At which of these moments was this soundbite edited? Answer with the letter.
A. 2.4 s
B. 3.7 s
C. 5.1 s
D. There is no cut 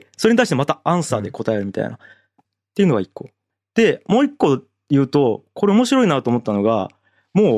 A